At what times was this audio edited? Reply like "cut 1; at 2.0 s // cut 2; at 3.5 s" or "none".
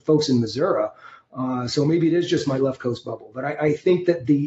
none